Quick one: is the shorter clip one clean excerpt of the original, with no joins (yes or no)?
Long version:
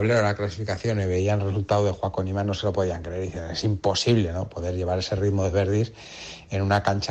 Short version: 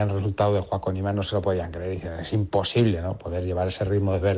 yes